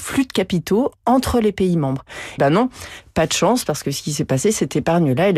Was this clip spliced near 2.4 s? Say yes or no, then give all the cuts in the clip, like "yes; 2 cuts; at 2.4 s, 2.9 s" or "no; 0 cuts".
yes; 1 cut; at 2.4 s